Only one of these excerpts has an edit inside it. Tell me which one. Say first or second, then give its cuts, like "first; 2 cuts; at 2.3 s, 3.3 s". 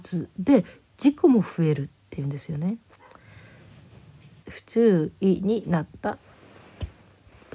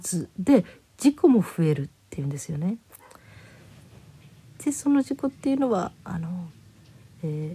first; 1 cut; at 4.4 s